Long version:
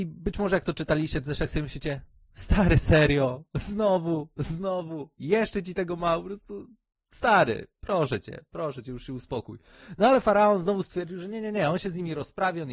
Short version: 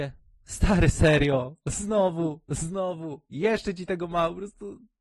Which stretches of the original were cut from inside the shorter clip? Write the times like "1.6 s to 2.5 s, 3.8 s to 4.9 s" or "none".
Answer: none